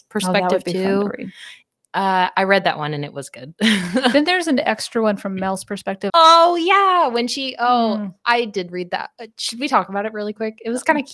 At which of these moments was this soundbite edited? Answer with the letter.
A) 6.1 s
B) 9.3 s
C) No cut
A